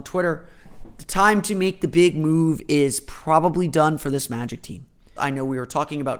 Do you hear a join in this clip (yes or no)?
yes